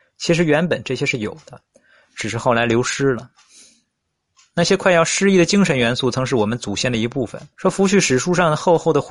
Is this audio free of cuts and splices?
no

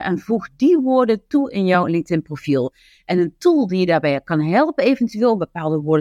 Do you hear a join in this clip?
no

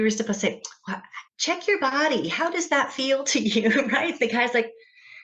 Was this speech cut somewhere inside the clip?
yes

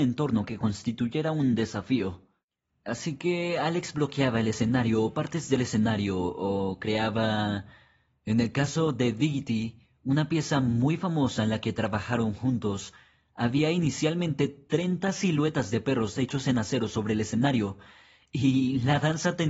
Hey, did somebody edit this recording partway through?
no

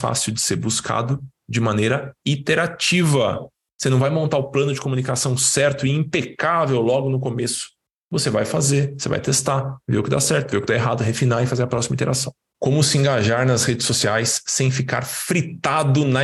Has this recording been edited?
yes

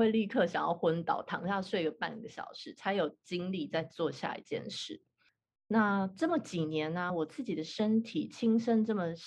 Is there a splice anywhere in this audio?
no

